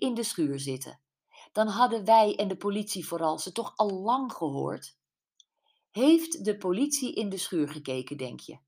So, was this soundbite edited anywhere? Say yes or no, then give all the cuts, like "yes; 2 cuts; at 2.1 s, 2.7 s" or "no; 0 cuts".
no; 0 cuts